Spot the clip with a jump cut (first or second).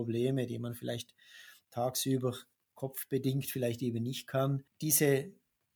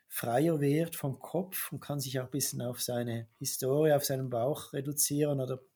first